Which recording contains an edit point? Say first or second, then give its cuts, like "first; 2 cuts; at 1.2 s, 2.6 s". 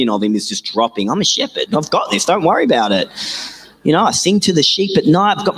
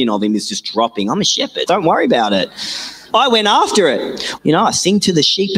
second; 3 cuts; at 1.7 s, 3.1 s, 4.4 s